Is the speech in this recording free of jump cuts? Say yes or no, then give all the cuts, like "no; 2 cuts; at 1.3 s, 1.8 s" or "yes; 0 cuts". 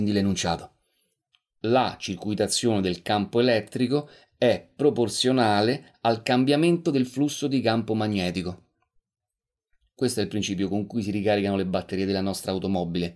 yes; 0 cuts